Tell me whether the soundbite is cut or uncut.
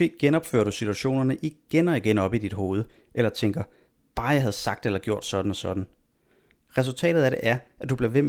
uncut